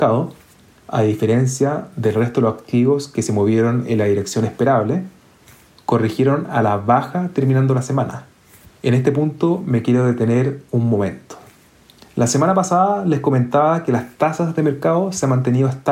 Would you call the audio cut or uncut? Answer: uncut